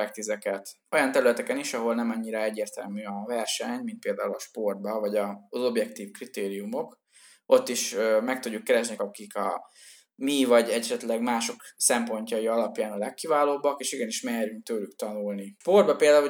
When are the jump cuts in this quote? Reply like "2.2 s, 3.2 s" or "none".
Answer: 9.0 s